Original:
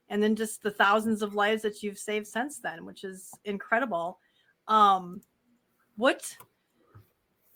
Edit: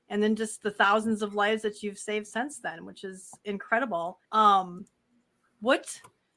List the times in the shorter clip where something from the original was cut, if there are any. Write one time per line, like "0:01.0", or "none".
0:04.2